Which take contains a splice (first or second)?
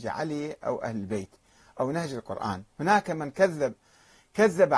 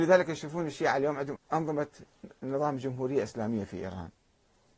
second